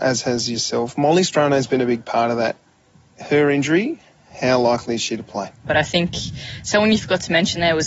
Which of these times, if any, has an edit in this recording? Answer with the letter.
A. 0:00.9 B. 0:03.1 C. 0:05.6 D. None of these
C